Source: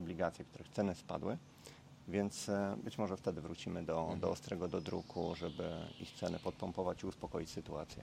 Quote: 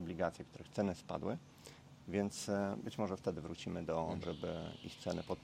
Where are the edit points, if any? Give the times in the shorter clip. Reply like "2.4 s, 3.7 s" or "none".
4.2 s